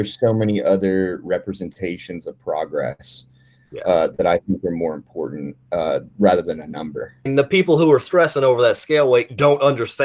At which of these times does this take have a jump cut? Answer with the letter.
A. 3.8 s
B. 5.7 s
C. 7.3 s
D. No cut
C